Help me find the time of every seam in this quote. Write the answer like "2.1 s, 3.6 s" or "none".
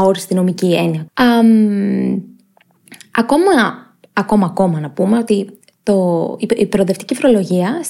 1.1 s